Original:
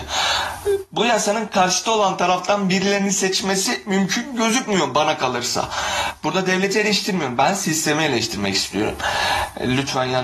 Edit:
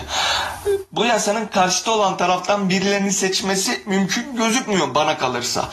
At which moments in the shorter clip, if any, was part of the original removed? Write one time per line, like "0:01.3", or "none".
none